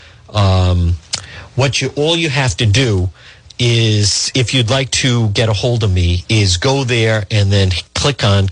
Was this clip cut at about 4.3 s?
no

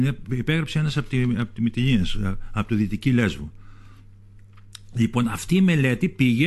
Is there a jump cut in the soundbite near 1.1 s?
no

